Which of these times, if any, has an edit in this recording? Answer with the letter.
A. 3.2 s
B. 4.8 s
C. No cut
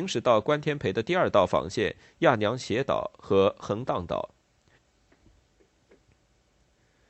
B